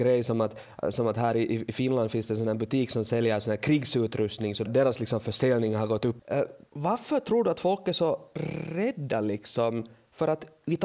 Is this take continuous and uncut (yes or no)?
yes